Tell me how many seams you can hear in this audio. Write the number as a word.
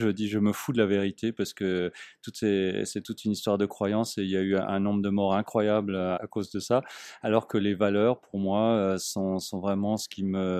one